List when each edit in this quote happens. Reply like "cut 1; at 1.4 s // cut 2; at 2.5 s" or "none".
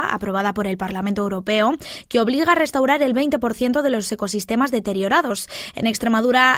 none